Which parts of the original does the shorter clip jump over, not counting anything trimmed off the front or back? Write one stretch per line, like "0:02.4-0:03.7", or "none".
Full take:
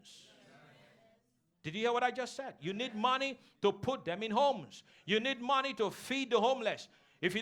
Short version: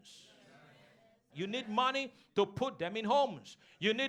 0:01.3-0:02.6